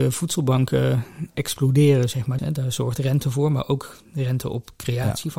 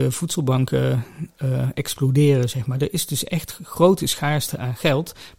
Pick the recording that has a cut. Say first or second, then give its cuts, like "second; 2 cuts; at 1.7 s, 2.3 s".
first; 2 cuts; at 1.3 s, 2.4 s